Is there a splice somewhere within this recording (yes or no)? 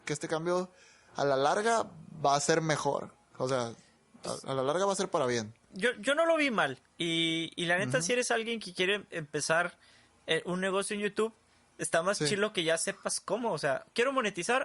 yes